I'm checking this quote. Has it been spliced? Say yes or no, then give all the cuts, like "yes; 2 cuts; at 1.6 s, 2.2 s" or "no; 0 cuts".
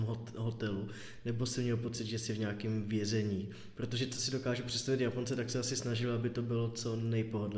no; 0 cuts